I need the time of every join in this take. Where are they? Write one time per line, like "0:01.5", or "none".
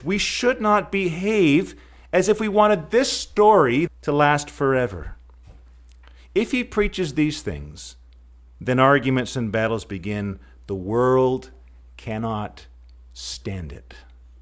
0:03.9